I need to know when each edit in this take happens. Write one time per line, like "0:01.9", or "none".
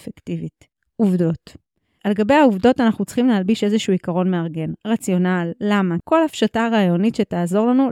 0:06.0